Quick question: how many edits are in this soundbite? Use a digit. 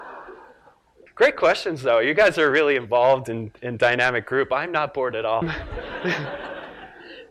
0